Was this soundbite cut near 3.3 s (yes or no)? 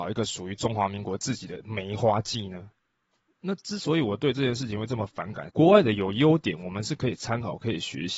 no